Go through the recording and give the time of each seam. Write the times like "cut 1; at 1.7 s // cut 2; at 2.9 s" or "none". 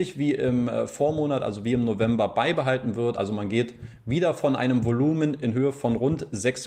none